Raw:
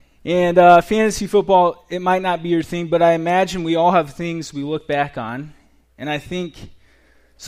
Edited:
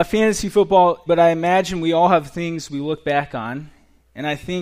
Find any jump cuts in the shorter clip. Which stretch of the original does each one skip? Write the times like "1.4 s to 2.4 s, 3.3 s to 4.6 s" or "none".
1.8 s to 2.9 s